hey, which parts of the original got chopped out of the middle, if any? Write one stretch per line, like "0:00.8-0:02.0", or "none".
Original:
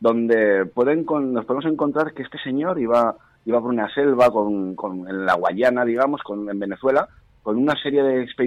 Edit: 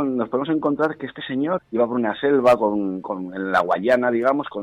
0:02.7-0:03.3